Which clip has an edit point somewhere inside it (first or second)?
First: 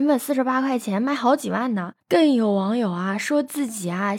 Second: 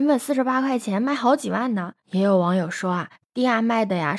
first